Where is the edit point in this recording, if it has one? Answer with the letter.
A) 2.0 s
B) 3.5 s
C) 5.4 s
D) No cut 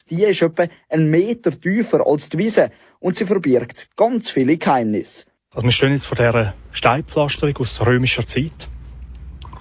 C